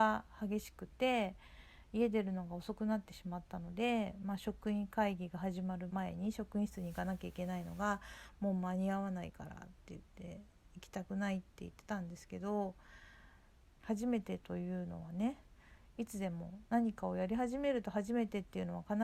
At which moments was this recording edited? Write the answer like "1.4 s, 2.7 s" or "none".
5.9 s, 13.8 s